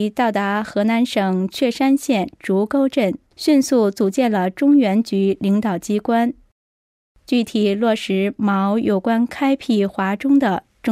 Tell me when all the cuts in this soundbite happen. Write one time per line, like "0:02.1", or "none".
0:03.3